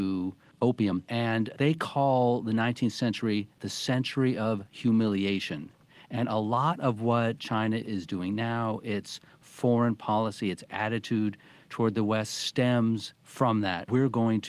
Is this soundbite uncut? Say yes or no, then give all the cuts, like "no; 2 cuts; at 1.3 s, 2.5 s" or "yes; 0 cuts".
yes; 0 cuts